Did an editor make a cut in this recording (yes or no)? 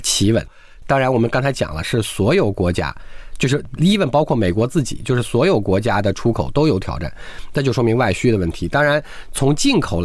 no